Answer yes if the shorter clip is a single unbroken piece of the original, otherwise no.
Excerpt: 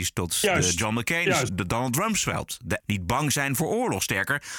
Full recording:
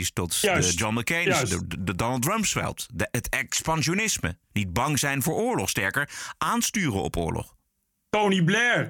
no